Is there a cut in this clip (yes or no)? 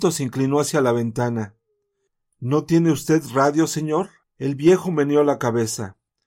yes